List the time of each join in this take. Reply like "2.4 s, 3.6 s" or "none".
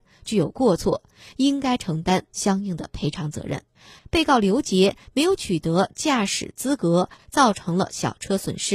4.0 s, 7.2 s